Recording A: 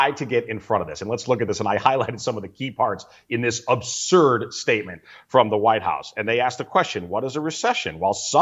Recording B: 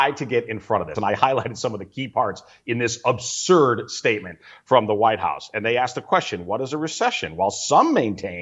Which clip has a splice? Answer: B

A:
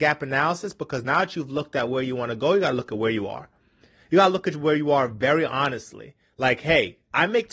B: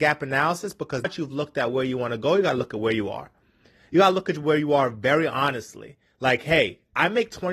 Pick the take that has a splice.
B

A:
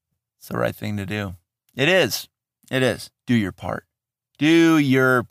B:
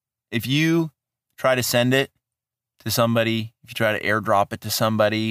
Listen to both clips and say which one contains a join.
A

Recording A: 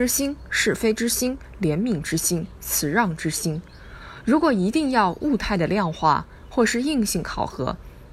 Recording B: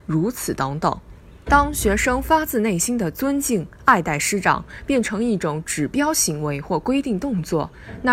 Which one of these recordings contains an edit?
B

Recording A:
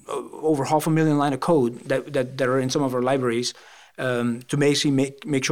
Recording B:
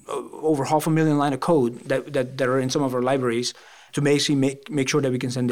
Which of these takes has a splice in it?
B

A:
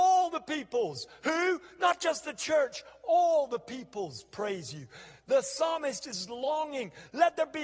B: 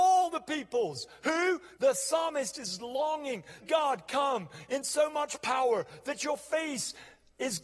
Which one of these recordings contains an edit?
B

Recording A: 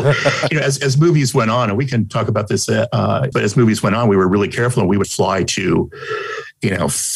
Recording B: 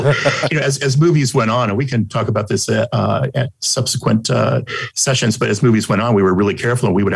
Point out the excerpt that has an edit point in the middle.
A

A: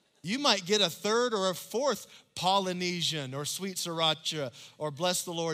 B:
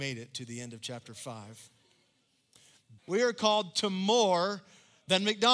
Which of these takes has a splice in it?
B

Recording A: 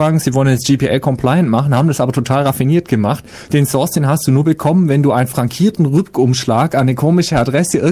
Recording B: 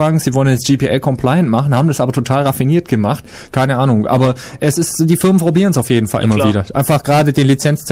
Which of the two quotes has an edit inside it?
B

